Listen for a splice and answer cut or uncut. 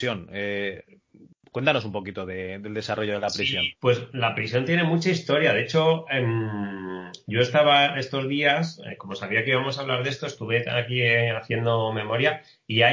cut